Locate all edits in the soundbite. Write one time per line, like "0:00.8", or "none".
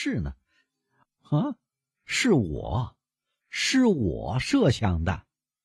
0:01.0